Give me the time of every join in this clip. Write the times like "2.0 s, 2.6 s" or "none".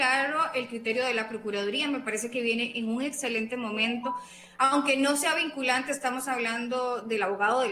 none